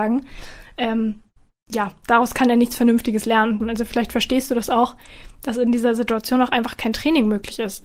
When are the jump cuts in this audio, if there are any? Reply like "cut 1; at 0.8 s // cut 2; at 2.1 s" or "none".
cut 1; at 3.6 s